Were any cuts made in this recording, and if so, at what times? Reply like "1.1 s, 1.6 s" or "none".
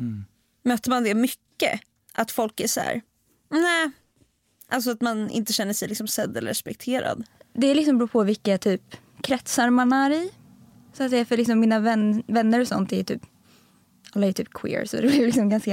none